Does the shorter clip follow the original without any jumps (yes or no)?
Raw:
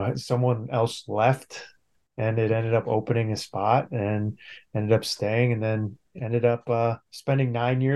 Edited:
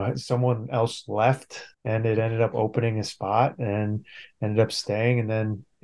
no